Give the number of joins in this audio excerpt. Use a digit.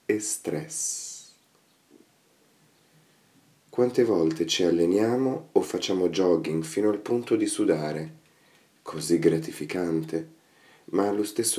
0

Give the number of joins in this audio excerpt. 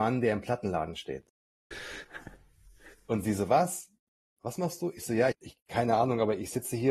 2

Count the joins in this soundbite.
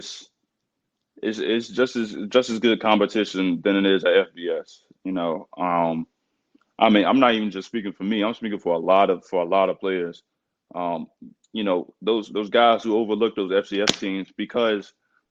0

